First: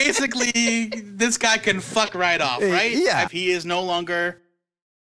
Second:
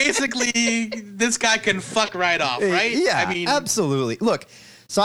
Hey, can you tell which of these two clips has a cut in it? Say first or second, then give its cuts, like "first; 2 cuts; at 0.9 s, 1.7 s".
first; 1 cut; at 3.3 s